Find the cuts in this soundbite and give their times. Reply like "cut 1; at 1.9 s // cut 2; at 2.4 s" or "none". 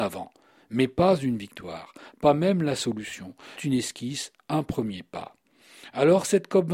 cut 1; at 3.6 s